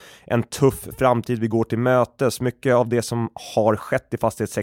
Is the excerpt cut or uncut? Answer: uncut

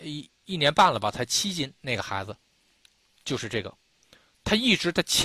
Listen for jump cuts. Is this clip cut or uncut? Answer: uncut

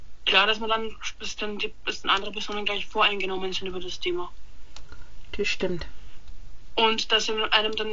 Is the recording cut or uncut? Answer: uncut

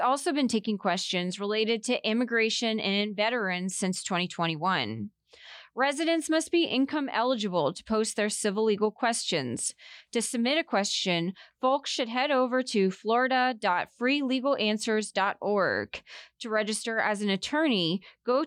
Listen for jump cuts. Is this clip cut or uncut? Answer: uncut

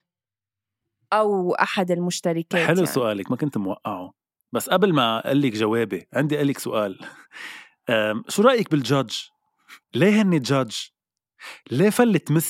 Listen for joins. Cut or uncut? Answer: cut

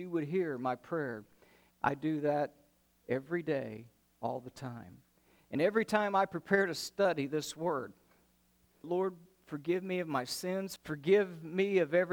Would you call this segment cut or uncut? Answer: cut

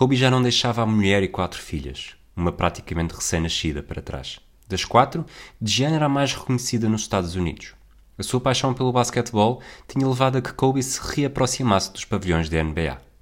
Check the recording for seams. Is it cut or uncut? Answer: cut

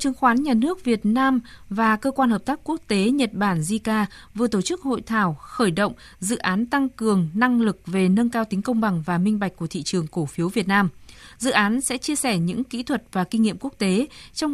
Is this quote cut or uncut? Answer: uncut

